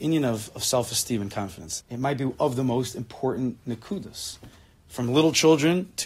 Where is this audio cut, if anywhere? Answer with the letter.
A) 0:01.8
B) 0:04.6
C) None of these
A